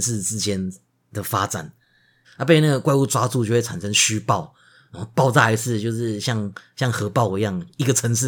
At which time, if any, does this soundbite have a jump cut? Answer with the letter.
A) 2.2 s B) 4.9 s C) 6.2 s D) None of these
A